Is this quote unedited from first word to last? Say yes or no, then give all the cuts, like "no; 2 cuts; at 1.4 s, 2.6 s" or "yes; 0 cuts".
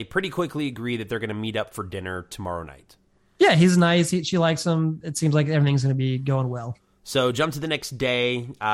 yes; 0 cuts